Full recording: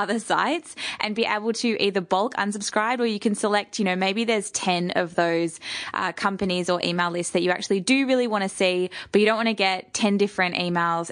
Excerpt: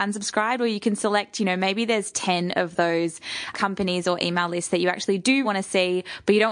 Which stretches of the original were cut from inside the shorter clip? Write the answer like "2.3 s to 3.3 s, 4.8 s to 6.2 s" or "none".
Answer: 5.9 s to 6.1 s, 8.1 s to 8.3 s